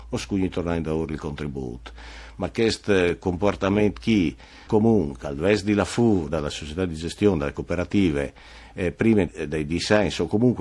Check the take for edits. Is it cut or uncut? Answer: cut